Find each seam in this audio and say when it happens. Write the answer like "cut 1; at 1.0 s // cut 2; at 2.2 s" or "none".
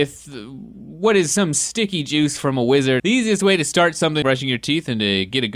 cut 1; at 3.0 s // cut 2; at 4.2 s